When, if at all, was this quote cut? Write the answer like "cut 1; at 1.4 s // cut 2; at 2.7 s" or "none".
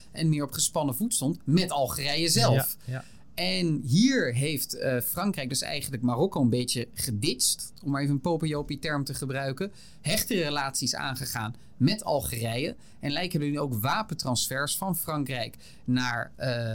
none